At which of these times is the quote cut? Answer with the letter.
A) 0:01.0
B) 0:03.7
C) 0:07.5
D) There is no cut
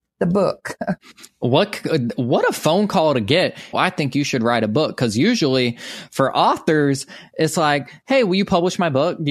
B